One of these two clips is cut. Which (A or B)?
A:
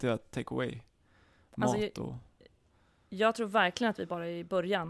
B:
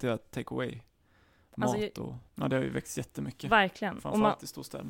B